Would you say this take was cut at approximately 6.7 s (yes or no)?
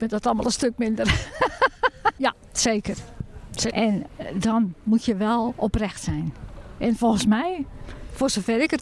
no